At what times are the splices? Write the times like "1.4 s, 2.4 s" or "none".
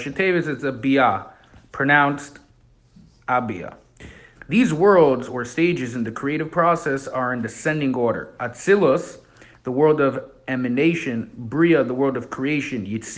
4.4 s